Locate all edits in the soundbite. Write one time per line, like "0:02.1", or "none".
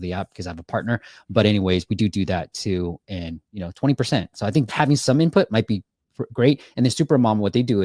0:04.7